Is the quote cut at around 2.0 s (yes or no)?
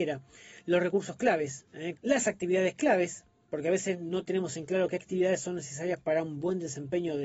yes